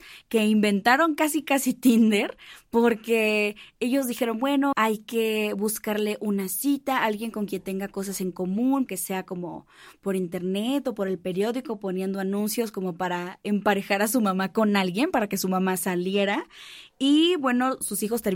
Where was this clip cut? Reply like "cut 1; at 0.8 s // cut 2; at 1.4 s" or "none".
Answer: cut 1; at 4.7 s // cut 2; at 8.9 s